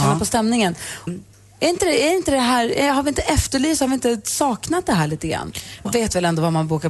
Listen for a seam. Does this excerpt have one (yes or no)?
yes